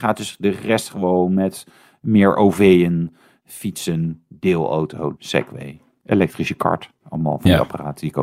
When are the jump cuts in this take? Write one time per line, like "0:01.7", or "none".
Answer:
0:05.2